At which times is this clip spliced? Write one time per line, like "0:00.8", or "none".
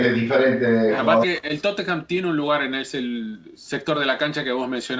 0:01.2